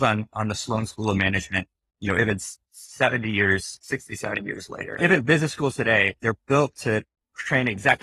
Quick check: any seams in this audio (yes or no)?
yes